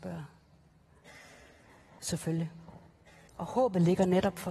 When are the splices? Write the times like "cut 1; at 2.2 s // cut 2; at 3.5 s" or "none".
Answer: cut 1; at 3.3 s